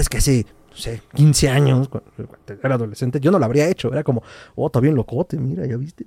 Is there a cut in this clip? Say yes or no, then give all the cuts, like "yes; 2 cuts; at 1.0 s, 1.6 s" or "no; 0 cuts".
no; 0 cuts